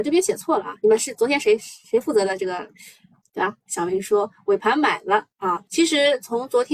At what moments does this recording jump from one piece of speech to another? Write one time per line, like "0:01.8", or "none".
0:03.6
0:05.7